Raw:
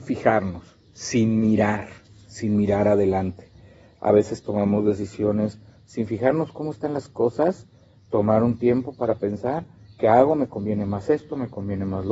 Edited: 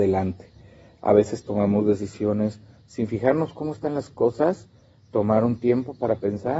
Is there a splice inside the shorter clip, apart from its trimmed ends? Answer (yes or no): no